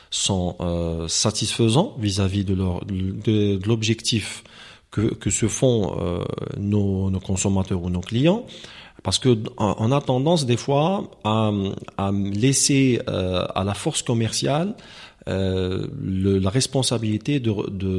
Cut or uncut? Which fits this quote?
uncut